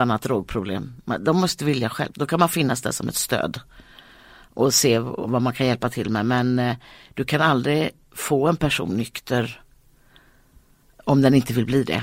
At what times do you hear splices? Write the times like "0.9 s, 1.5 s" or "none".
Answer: 2.1 s